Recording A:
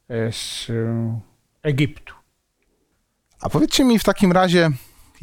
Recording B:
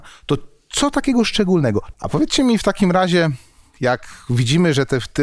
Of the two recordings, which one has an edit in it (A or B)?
B